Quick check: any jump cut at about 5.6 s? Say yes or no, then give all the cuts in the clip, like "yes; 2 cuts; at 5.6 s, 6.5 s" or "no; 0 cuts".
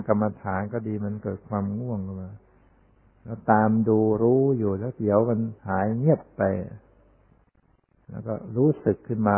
yes; 1 cut; at 5.6 s